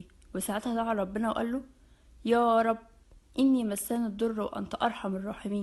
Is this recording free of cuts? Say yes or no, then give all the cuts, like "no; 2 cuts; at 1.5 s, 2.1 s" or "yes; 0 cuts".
yes; 0 cuts